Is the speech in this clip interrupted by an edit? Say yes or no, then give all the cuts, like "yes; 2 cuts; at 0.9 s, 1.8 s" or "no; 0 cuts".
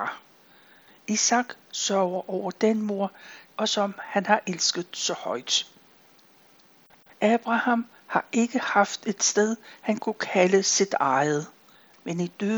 yes; 1 cut; at 3.5 s